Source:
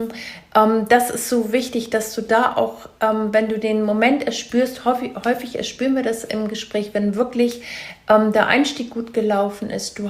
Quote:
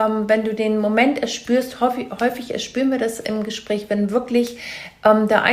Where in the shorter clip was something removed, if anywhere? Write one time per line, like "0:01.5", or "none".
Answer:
none